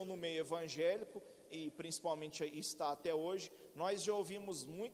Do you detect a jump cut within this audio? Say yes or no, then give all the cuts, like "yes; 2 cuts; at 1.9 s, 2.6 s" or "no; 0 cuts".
yes; 1 cut; at 1.5 s